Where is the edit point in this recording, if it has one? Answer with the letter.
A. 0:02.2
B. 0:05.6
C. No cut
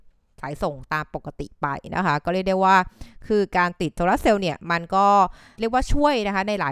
B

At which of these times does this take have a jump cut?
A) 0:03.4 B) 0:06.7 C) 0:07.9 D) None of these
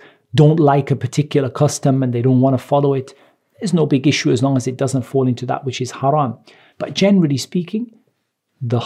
B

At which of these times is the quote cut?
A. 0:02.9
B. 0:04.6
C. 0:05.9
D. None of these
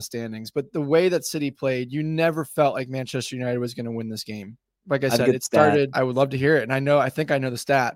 C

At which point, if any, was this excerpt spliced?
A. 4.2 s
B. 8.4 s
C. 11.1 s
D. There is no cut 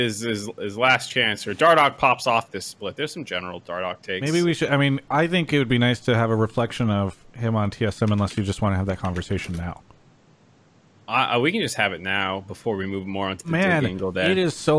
D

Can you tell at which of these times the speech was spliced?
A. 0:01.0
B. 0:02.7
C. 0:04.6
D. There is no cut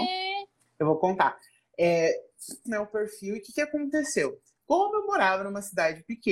B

